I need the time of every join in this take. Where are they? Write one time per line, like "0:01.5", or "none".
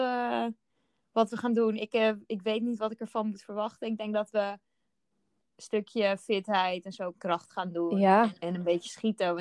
0:07.1